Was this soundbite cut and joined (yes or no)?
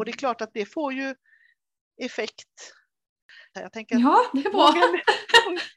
yes